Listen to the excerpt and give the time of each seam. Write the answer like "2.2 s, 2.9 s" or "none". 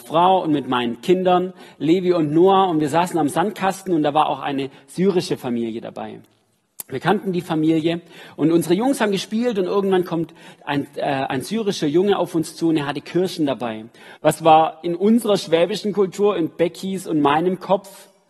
14.2 s